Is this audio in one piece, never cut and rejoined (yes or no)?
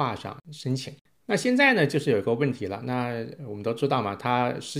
yes